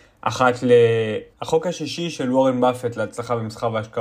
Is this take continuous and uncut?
no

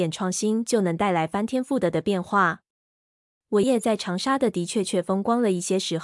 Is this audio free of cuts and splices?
no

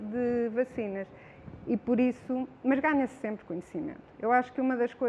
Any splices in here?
no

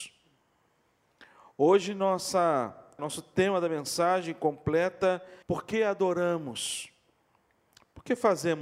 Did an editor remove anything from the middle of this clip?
yes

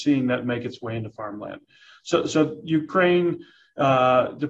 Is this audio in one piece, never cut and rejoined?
yes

